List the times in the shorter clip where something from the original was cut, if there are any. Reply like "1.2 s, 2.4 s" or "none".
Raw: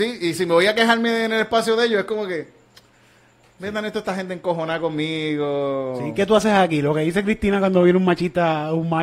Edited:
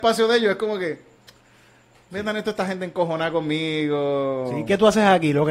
none